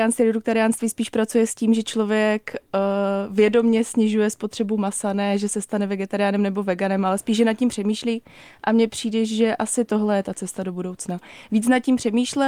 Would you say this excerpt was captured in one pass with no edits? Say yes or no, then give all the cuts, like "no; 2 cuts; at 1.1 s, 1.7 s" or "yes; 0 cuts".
yes; 0 cuts